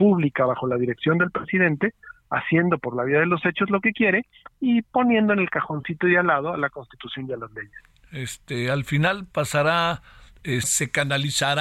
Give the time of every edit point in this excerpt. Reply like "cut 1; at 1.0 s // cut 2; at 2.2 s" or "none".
cut 1; at 10.6 s